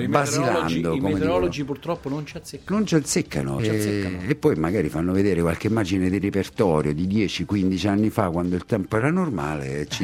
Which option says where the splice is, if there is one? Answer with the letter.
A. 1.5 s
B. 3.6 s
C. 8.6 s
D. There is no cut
B